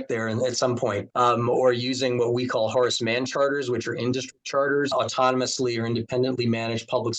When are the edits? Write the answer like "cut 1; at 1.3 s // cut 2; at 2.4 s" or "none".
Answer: cut 1; at 1.1 s // cut 2; at 4.9 s